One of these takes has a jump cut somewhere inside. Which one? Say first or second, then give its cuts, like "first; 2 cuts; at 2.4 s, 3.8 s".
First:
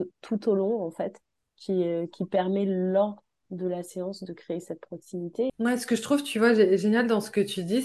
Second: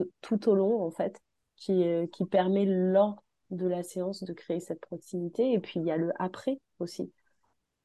first; 1 cut; at 5.5 s